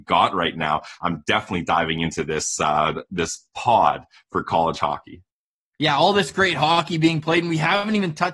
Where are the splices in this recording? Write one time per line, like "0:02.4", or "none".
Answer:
none